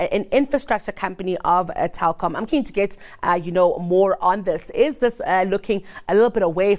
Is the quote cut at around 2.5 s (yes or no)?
yes